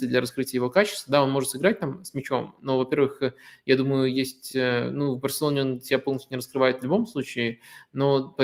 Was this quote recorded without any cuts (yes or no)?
yes